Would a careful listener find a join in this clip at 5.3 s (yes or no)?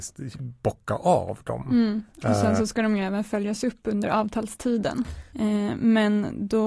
yes